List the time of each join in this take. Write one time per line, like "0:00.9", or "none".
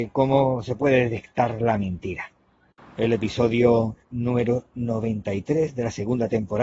0:02.9
0:04.0